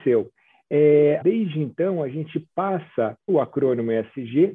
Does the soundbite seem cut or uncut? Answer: cut